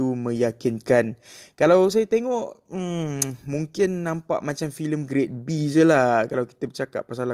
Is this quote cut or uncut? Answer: uncut